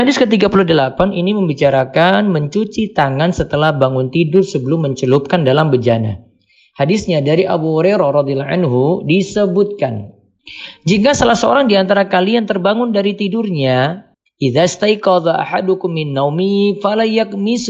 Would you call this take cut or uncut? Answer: uncut